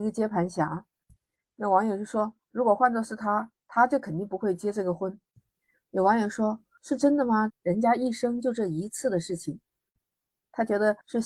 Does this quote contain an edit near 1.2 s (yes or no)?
no